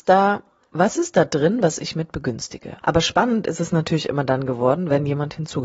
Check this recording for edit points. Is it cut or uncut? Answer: cut